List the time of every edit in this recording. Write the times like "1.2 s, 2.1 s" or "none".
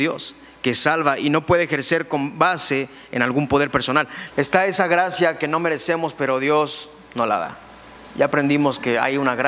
4.3 s